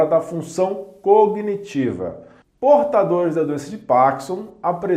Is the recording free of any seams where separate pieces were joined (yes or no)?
yes